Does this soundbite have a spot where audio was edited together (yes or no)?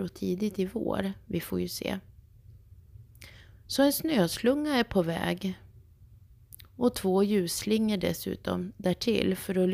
no